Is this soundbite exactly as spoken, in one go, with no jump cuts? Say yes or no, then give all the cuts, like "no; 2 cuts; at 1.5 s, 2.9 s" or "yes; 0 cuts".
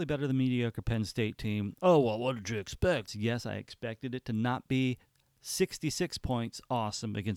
no; 1 cut; at 3.1 s